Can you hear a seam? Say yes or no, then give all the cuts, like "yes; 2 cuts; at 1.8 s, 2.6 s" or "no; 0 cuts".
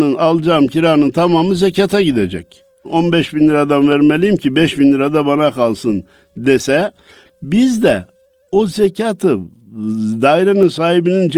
yes; 1 cut; at 2.8 s